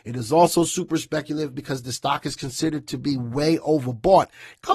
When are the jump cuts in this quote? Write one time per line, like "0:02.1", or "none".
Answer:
none